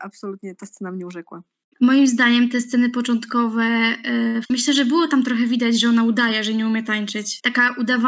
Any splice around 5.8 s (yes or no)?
no